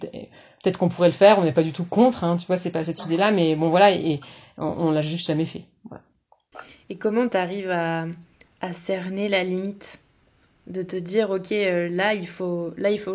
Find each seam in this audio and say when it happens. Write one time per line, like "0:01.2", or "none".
none